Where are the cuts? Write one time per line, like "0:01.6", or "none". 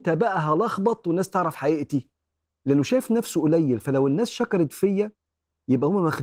0:02.4